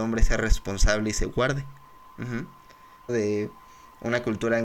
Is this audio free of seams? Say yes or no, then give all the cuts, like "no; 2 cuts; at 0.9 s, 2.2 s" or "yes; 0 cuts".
no; 1 cut; at 3.1 s